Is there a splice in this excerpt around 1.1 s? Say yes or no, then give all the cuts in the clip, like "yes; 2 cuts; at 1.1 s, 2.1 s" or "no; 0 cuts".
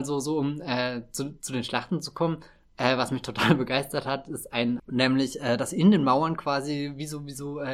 no; 1 cut; at 4.8 s